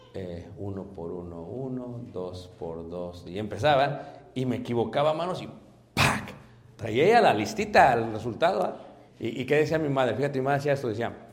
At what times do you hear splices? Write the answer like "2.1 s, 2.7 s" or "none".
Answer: 9.1 s